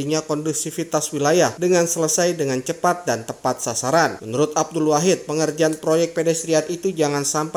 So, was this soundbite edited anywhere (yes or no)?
no